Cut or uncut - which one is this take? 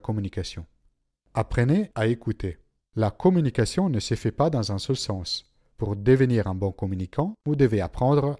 uncut